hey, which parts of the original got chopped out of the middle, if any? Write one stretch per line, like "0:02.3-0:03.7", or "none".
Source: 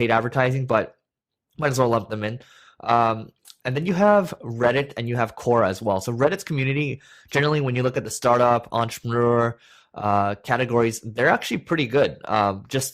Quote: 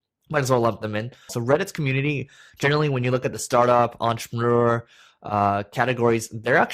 0:02.6-0:06.0